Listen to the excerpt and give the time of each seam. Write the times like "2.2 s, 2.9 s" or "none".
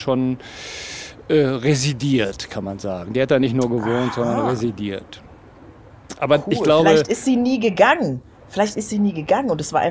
none